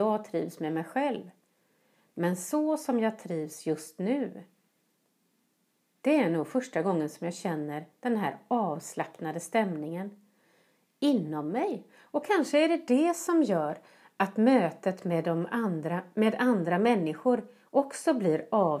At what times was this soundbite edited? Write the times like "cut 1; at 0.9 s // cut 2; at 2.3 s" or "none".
none